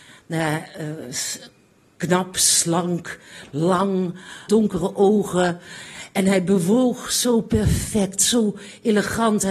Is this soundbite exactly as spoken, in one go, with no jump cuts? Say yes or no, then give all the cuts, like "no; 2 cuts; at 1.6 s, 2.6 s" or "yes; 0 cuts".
no; 1 cut; at 4.5 s